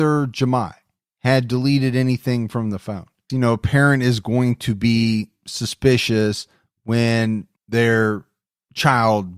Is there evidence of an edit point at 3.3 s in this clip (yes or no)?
yes